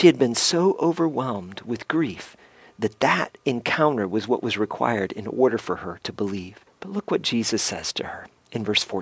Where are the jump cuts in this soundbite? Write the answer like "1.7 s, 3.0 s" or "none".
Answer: 6.7 s